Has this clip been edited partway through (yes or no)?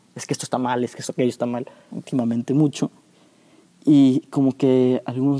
yes